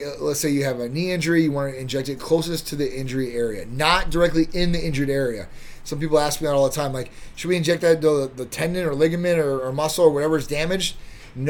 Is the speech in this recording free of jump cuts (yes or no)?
yes